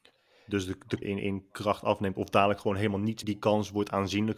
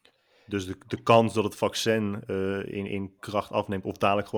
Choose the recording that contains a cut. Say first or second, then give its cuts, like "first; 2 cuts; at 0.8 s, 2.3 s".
first; 2 cuts; at 1.0 s, 3.2 s